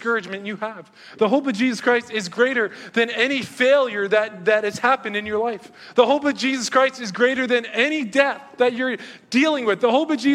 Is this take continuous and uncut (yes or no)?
yes